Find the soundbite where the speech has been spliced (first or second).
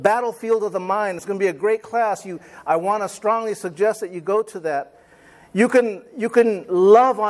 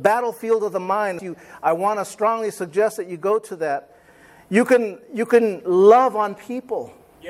second